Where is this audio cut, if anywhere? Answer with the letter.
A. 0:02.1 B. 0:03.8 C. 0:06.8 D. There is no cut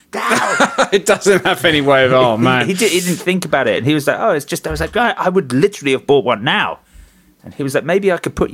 D